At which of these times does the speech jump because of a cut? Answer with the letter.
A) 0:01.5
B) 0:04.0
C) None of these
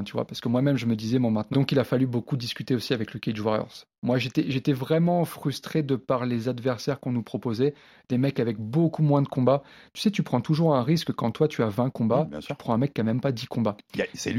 A